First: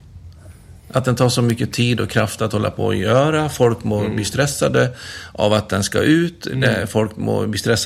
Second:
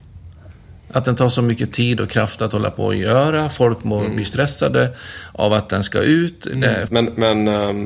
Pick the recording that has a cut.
second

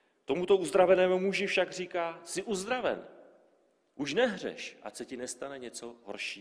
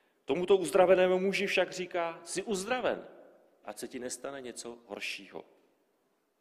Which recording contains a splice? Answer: second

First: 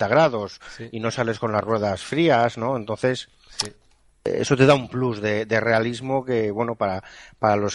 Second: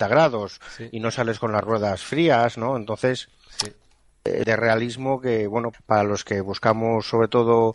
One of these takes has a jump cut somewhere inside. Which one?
second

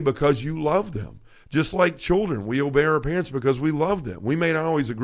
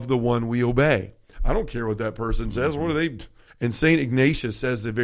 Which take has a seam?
second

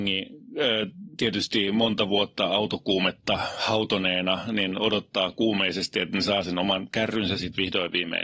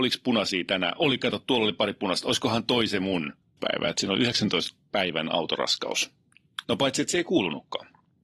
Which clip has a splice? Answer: second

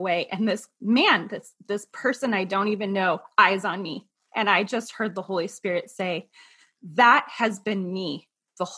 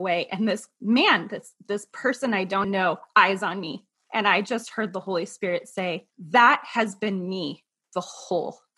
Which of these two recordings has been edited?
second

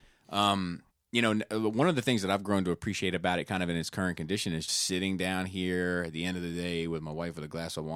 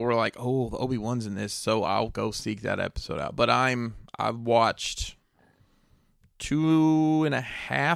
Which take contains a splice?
first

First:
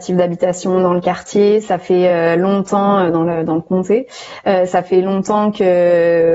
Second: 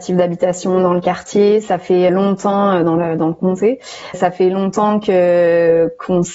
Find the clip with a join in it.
second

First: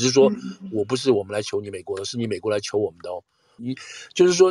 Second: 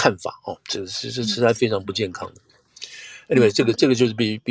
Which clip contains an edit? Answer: first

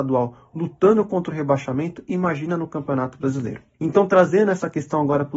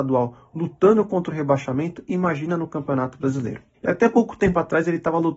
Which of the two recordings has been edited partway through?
second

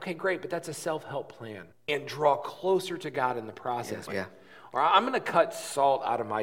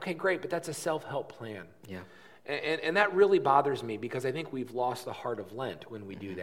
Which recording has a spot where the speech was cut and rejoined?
first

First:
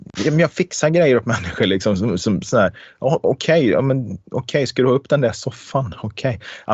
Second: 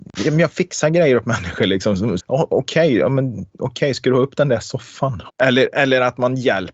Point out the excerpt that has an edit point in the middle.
second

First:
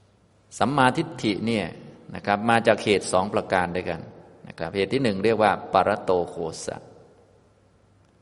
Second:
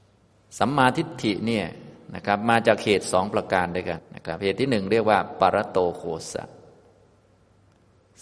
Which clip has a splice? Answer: second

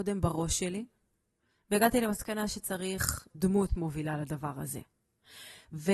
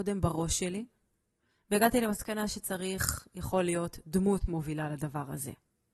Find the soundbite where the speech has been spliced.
first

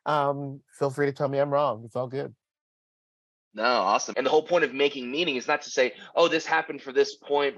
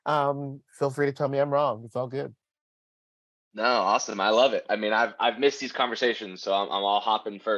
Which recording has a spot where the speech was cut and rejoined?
first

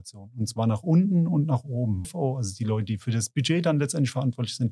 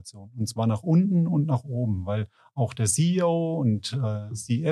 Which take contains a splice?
first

